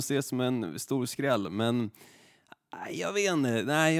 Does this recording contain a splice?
no; 0 cuts

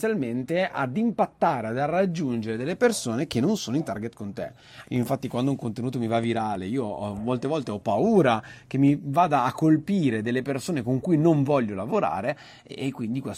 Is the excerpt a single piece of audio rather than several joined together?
no; 1 cut; at 4.8 s

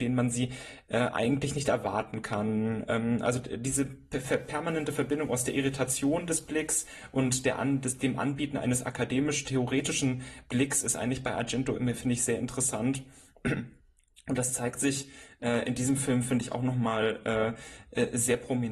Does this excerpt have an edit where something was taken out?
no; 0 cuts

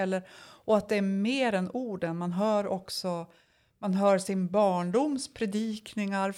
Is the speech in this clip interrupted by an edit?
no; 0 cuts

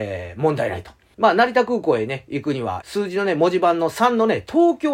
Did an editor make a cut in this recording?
yes; 2 cuts; at 1.1 s, 2.8 s

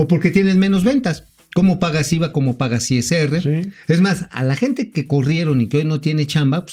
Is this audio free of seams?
yes; 0 cuts

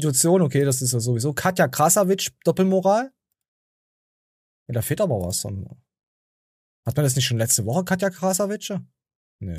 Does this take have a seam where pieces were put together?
no; 0 cuts

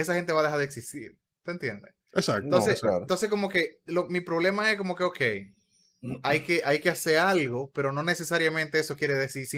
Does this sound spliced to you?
no; 0 cuts

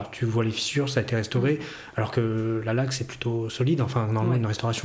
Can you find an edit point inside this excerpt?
no; 0 cuts

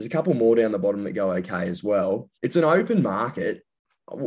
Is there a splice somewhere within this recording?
yes; 1 cut; at 2.4 s

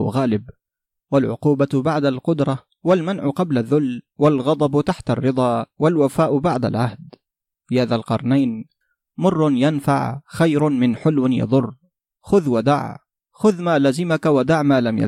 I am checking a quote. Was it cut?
no; 0 cuts

